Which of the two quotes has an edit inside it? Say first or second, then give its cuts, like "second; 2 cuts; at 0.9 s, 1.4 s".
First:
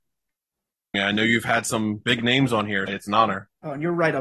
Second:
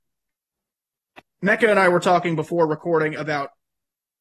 first; 2 cuts; at 0.9 s, 2.9 s